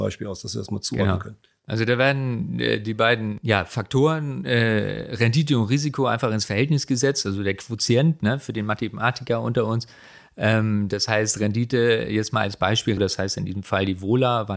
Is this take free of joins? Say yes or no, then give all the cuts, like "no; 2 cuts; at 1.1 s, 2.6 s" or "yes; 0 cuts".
no; 1 cut; at 13.0 s